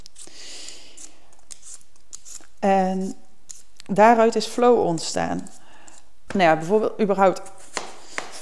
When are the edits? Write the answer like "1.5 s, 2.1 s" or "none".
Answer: 6.3 s